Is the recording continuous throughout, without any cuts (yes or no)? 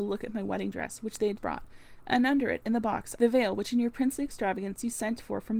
no